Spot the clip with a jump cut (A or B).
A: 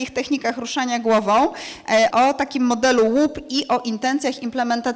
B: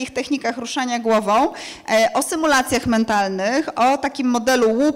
A